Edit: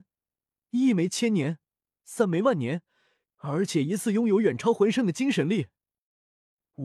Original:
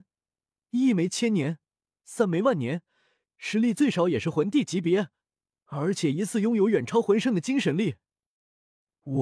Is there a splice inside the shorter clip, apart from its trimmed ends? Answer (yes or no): yes